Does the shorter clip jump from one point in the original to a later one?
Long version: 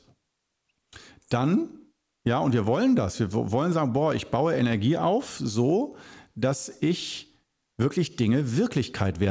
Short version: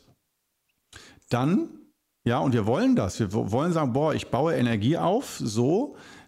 no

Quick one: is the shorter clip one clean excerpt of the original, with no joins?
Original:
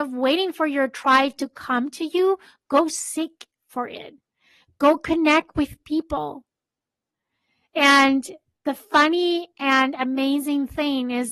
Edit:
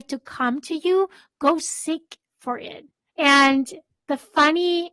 no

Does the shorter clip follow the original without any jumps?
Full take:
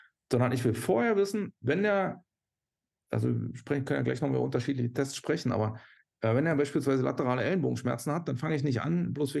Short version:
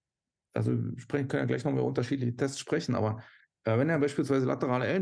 yes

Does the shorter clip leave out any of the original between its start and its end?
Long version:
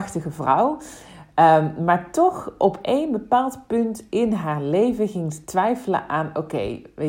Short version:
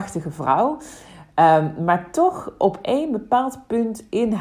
no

